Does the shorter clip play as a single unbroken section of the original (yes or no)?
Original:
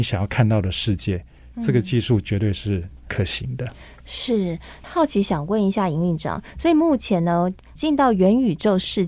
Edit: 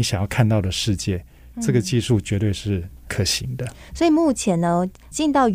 no